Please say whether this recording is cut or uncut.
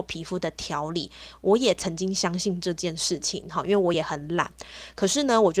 uncut